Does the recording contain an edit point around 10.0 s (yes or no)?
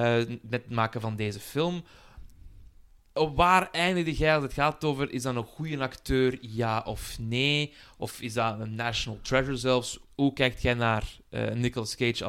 yes